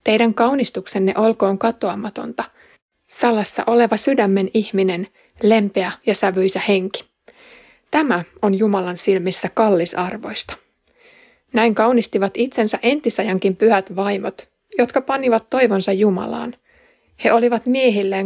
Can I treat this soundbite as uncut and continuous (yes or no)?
yes